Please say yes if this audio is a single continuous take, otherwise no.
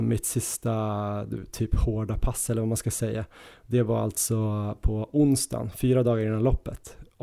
yes